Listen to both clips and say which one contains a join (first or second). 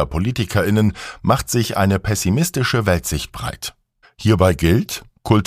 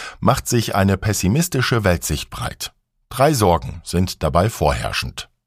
first